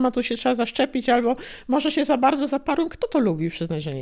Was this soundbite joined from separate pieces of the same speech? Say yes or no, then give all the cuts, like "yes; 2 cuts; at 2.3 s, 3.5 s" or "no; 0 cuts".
no; 0 cuts